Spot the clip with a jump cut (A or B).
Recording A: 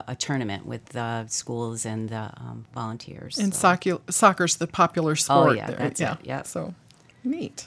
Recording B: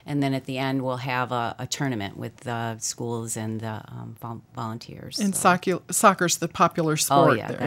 A